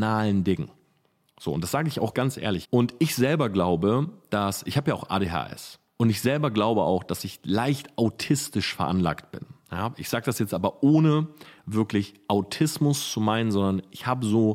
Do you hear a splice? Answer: yes; 1 cut; at 2.6 s

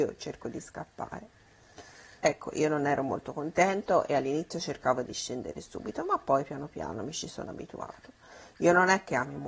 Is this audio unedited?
no; 1 cut; at 2.2 s

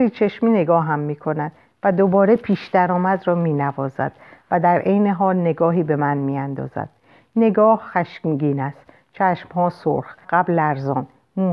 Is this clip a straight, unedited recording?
no; 1 cut; at 10.2 s

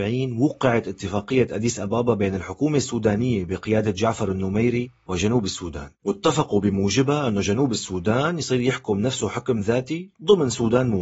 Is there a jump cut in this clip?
yes; 1 cut; at 5.9 s

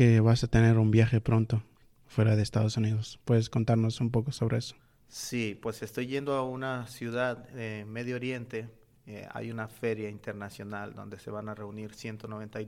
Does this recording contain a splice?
no; 0 cuts

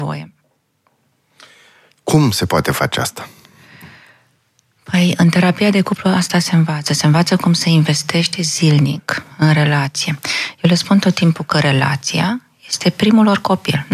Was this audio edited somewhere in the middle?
no; 0 cuts

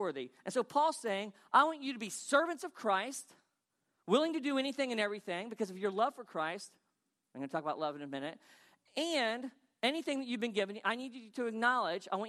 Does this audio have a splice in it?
no; 0 cuts

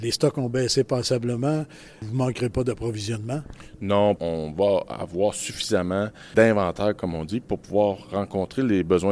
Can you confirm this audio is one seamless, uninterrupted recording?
yes; 0 cuts

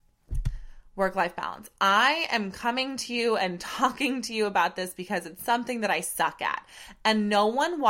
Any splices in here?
no; 0 cuts

